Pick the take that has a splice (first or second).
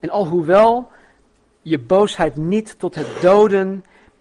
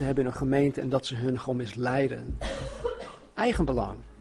second